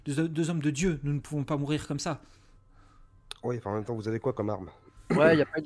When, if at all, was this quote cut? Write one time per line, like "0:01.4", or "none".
none